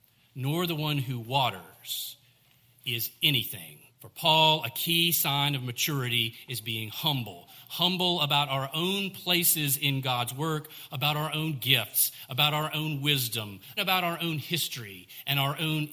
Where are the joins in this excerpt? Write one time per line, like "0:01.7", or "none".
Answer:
0:03.9
0:10.9
0:13.8